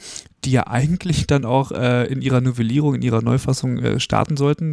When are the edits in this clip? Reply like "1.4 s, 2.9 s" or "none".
none